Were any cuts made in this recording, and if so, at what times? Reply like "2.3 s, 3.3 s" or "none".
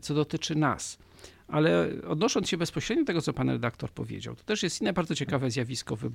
none